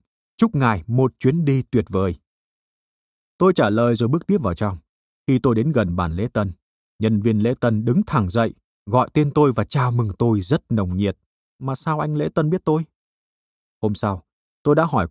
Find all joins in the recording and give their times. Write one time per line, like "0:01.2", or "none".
0:11.5